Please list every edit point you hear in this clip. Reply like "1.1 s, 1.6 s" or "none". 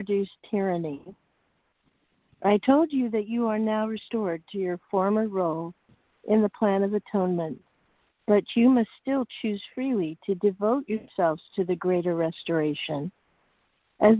none